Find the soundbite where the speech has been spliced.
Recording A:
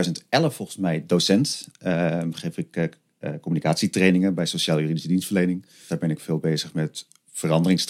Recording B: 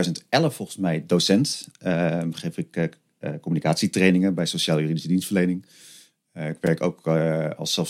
A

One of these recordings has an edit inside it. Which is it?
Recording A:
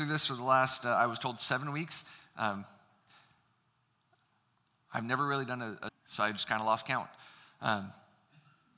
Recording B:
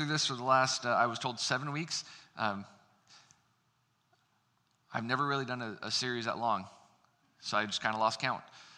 A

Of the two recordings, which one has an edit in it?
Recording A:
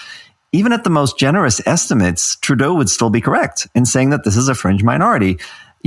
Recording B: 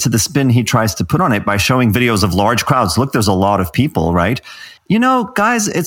B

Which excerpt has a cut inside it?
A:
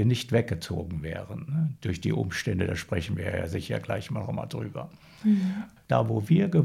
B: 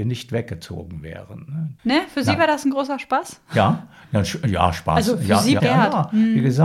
B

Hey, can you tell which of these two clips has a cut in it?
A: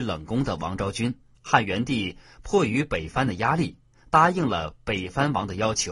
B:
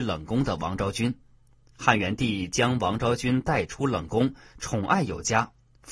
A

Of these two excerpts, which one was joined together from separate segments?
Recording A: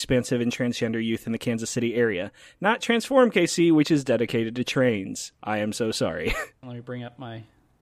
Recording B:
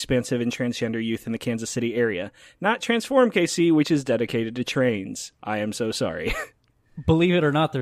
A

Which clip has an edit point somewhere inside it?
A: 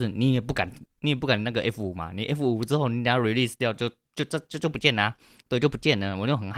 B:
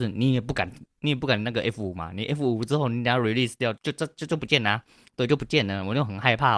B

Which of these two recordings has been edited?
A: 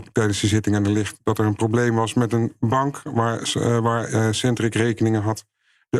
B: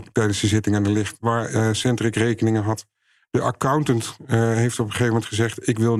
B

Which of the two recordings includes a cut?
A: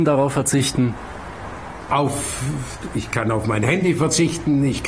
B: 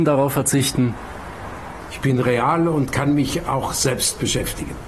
B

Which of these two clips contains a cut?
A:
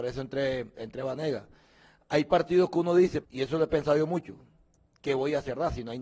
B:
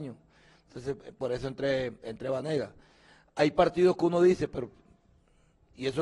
A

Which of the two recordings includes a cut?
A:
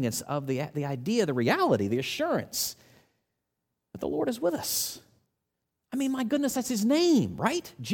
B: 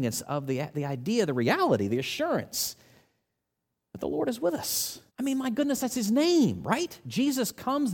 B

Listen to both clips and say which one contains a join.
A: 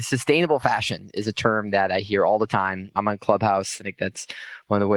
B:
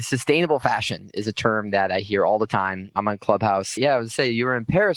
B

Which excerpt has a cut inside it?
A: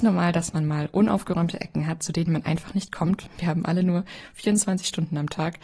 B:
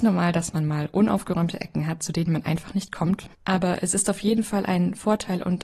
B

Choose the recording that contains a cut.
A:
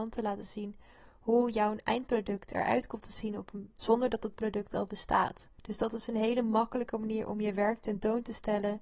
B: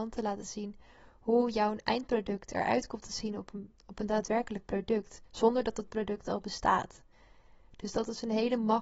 A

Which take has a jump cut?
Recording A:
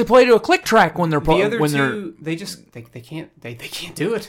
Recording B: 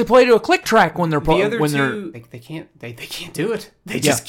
B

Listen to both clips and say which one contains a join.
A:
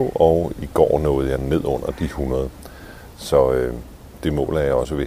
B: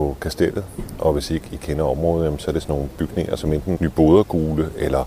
B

